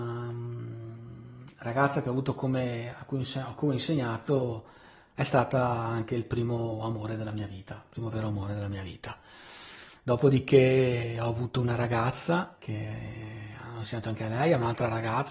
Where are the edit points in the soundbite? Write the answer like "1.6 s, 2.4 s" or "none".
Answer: 9.9 s, 12.6 s